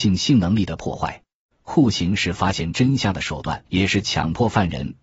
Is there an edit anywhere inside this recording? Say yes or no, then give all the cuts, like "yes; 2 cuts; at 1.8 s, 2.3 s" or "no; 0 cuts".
yes; 2 cuts; at 1.5 s, 3.7 s